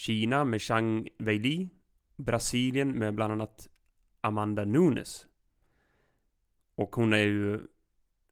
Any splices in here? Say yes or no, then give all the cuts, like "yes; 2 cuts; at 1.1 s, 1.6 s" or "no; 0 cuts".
no; 0 cuts